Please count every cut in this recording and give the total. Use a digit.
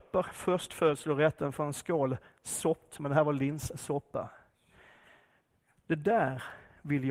2